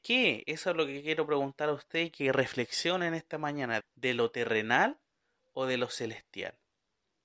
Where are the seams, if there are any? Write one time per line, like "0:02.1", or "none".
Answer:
0:03.8